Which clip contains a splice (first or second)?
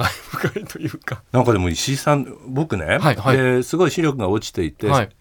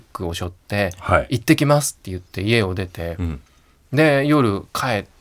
first